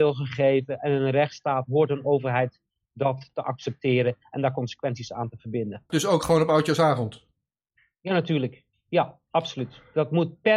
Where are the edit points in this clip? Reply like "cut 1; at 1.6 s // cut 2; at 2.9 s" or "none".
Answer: cut 1; at 5.9 s